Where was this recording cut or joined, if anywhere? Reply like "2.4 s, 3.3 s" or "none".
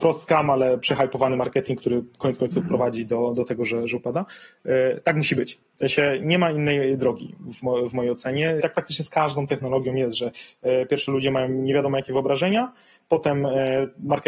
8.6 s